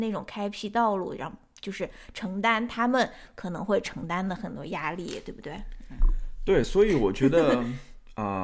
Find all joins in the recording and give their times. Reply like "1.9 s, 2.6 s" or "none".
none